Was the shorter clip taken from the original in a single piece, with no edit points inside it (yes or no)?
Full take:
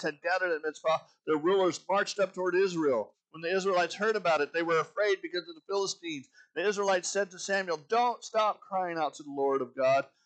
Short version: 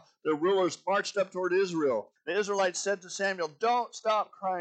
no